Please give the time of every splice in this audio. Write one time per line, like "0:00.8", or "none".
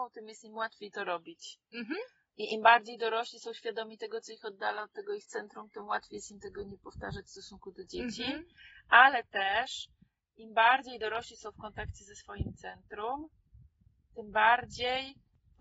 none